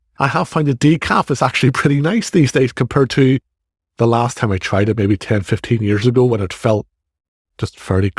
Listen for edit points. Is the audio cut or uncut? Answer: uncut